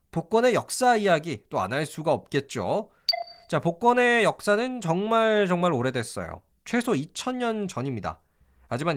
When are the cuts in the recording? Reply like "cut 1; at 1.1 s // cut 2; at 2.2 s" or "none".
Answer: cut 1; at 6.5 s